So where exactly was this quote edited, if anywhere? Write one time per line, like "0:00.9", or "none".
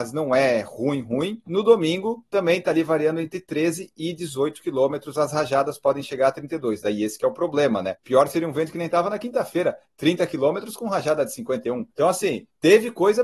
none